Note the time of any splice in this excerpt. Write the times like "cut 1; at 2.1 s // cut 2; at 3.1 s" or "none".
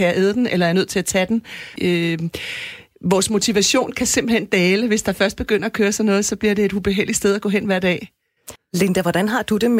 cut 1; at 1.8 s // cut 2; at 8.6 s